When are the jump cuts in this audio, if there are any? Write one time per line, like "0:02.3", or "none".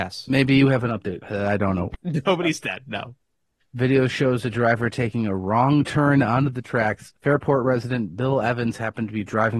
0:03.6
0:07.1